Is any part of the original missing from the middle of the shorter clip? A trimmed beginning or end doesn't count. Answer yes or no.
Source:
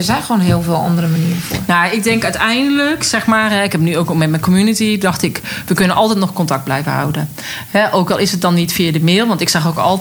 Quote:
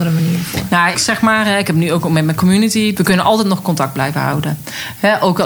yes